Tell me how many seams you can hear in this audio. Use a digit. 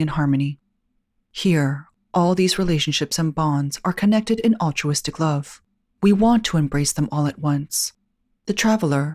1